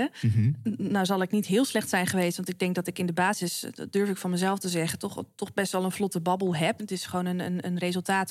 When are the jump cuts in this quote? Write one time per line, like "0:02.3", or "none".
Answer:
0:06.8